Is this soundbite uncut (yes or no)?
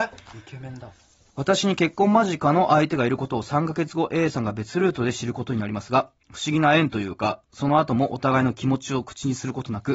yes